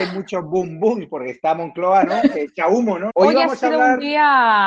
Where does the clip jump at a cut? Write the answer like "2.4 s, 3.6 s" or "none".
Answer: 3.1 s